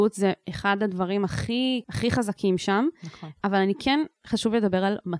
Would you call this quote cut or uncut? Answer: cut